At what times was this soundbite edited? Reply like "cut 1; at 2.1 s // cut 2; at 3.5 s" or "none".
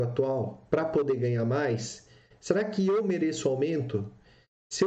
cut 1; at 2.3 s